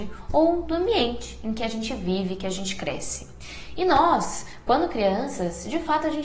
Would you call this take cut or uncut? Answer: uncut